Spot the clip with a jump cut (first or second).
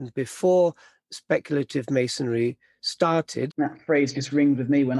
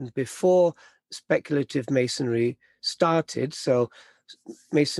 first